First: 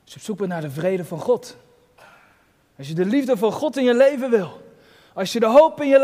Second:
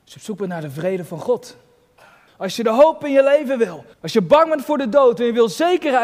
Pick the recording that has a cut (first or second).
second